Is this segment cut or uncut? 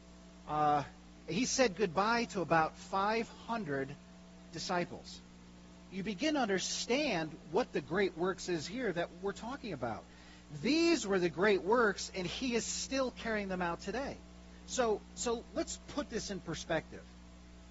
cut